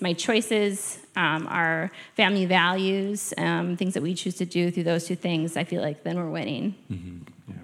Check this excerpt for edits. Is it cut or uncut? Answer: uncut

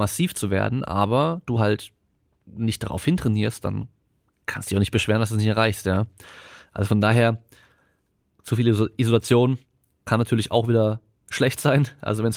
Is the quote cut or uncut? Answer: uncut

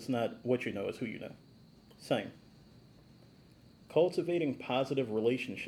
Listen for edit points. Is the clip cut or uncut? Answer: cut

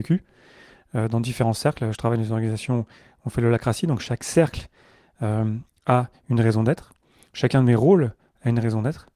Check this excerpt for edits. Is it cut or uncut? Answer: uncut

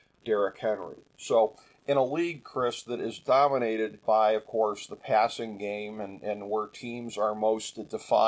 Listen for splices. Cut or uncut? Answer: cut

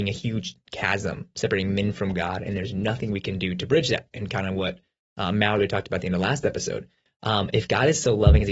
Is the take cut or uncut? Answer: uncut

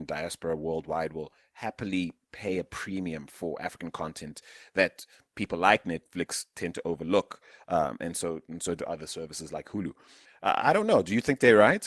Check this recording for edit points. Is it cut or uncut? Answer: uncut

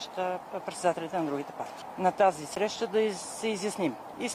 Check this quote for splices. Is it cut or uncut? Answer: uncut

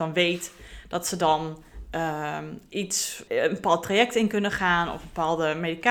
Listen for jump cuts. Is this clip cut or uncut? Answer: cut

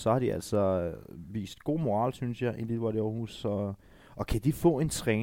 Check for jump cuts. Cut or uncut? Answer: uncut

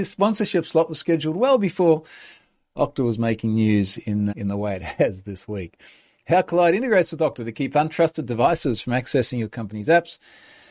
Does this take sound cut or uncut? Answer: cut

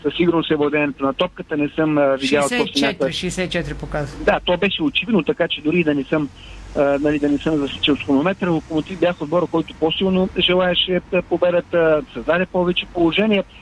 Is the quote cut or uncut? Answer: uncut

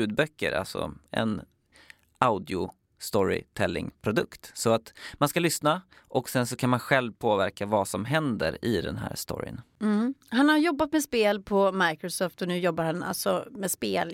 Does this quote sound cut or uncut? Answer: uncut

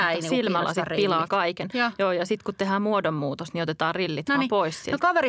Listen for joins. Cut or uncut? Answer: uncut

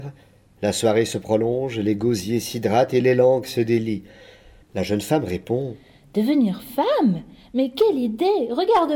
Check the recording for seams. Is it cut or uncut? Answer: cut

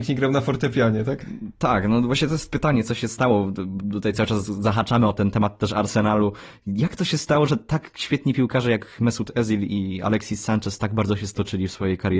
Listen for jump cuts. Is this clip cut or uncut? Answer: uncut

